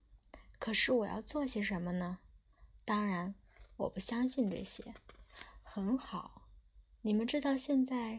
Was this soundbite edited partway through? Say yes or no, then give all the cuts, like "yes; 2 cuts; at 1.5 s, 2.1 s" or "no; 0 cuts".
no; 0 cuts